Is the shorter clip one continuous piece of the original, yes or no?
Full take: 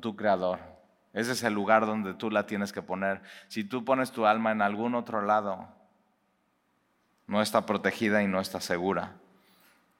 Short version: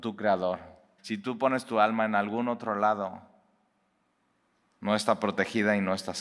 no